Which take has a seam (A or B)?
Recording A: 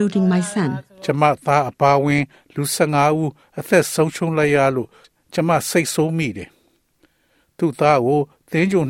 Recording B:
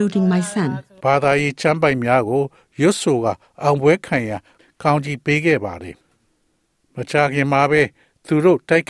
B